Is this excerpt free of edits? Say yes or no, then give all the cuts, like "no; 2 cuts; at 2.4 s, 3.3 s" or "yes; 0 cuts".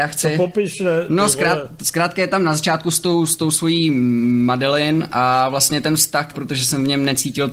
no; 1 cut; at 6.3 s